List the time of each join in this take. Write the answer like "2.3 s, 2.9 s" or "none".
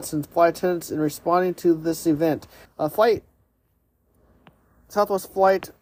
2.7 s